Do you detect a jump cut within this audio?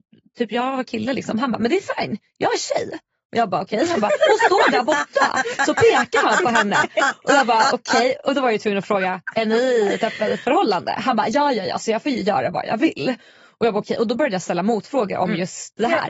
no; 0 cuts

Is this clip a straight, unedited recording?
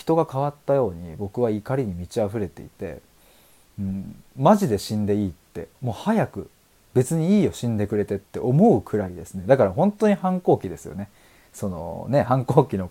no; 1 cut; at 5.8 s

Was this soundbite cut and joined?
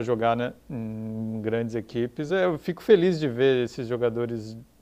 no; 0 cuts

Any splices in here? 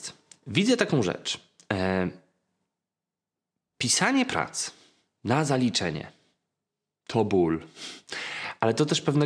no; 0 cuts

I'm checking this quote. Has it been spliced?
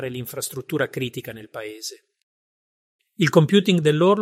yes; 1 cut; at 3.0 s

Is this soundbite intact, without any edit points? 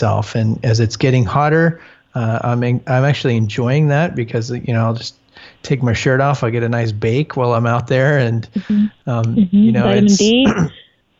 yes; 0 cuts

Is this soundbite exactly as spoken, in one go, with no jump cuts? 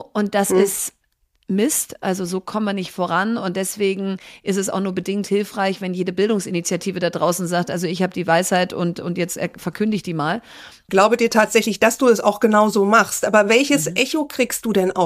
no; 1 cut; at 10.9 s

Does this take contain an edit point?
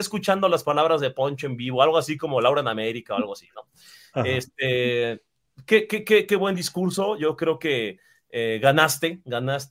no; 0 cuts

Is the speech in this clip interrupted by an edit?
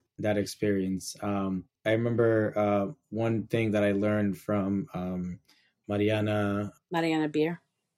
no; 0 cuts

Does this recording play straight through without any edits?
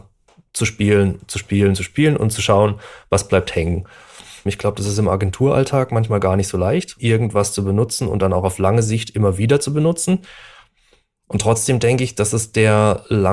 no; 2 cuts; at 4.5 s, 7.0 s

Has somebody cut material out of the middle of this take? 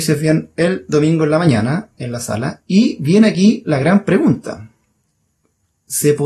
no; 0 cuts

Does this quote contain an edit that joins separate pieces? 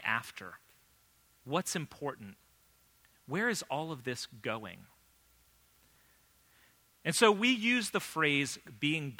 no; 0 cuts

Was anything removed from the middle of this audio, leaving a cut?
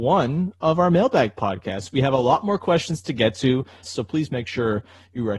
yes; 1 cut; at 3.8 s

